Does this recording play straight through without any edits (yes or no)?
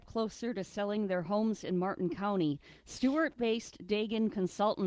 yes